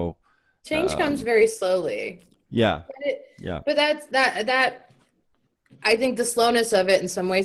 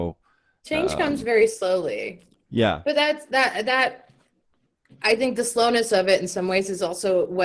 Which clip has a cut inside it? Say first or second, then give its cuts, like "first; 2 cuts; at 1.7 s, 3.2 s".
second; 1 cut; at 2.8 s